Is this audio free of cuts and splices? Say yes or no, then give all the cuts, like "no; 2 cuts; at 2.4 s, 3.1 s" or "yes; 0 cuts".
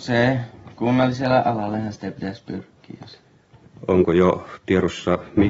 yes; 0 cuts